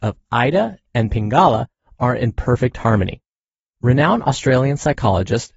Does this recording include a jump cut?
no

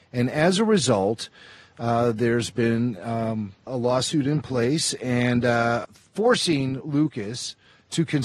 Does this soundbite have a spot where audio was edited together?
yes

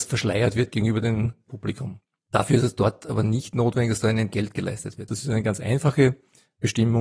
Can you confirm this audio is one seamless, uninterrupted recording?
no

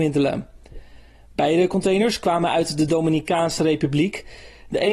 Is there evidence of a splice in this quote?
no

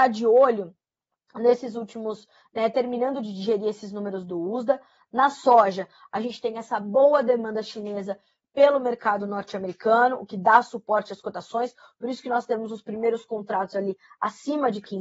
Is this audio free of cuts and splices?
yes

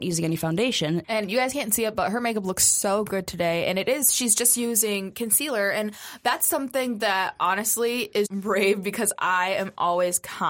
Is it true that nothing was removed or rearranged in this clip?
no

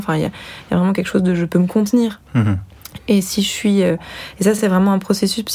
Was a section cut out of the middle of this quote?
no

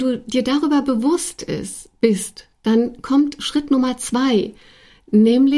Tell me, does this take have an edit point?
no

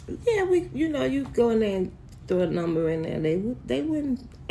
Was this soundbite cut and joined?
no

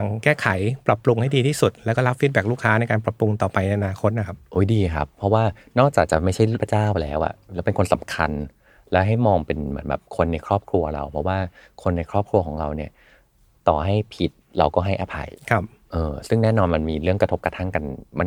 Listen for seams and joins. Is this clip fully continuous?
yes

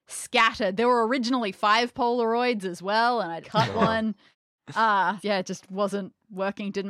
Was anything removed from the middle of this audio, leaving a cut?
yes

